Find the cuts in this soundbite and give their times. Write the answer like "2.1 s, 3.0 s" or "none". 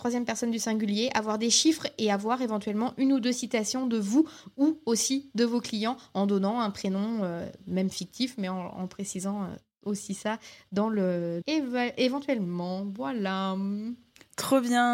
11.4 s